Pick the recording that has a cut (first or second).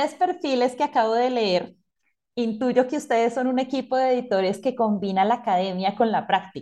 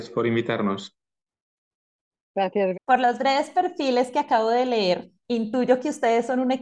second